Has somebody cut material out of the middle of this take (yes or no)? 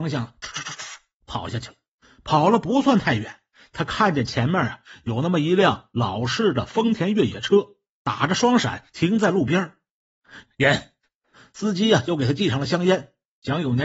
yes